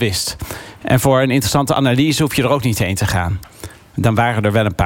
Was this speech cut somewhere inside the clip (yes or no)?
yes